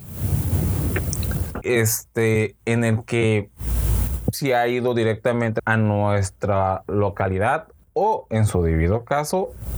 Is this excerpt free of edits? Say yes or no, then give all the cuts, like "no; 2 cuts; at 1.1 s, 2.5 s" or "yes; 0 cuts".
no; 2 cuts; at 1.6 s, 5.6 s